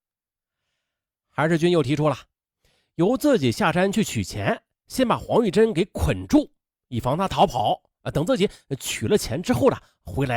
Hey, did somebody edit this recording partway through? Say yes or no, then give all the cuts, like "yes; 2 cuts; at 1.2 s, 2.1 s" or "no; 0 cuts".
no; 0 cuts